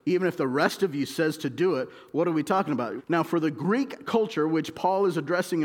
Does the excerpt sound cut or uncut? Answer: cut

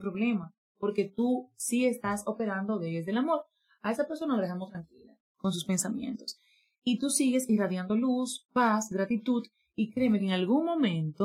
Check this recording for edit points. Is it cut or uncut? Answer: uncut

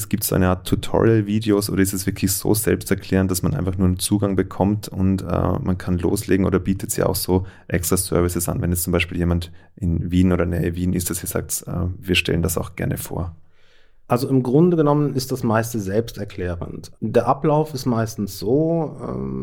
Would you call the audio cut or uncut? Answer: uncut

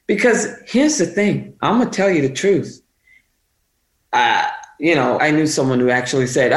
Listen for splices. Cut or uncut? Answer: cut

